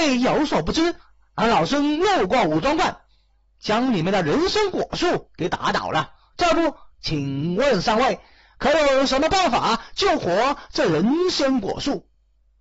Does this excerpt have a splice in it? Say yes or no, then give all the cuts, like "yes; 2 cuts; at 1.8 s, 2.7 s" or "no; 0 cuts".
no; 0 cuts